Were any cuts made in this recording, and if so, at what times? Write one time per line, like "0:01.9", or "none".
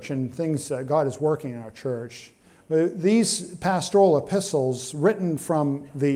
none